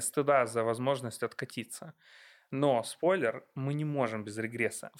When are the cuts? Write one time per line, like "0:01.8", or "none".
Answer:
none